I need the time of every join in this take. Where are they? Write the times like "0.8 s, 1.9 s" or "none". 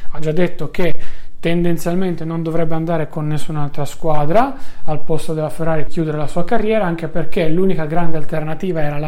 5.9 s

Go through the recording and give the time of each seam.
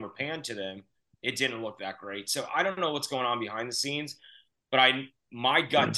none

